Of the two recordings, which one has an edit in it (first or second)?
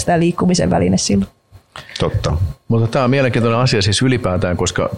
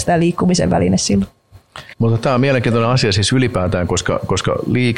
second